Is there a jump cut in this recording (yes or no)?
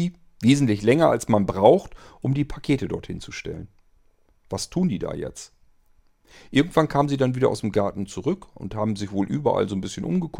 no